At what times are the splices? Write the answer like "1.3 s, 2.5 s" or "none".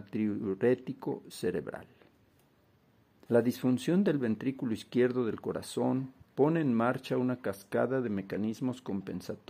3.3 s, 6.2 s

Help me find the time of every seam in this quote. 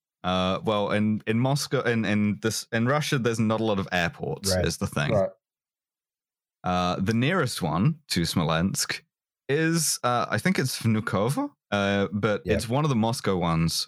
none

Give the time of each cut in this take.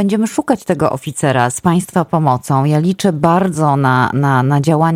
none

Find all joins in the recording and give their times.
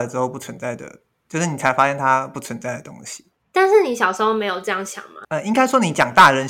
5.2 s

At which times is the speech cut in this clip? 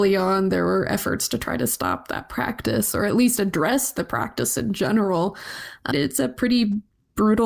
5.9 s

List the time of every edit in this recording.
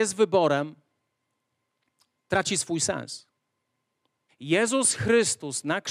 4.3 s

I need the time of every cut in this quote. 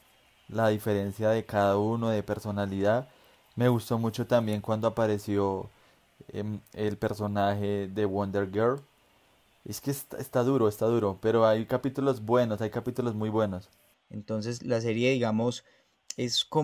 13.9 s

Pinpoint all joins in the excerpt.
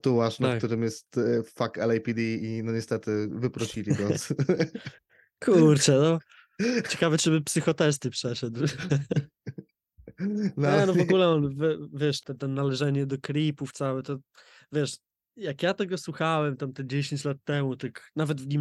12.2 s

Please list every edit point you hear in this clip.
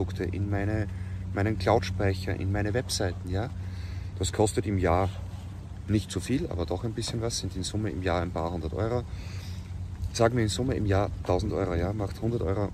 none

